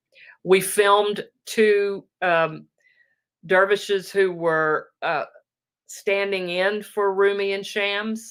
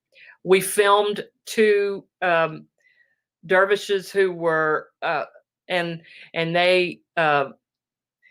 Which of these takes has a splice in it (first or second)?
second